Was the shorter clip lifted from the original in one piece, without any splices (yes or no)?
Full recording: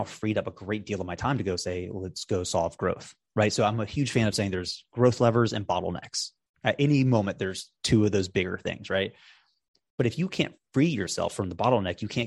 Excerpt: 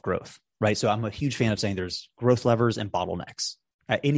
yes